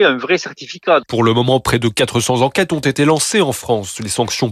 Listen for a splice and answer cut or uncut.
cut